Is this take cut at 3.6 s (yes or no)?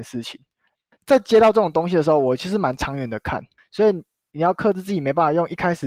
yes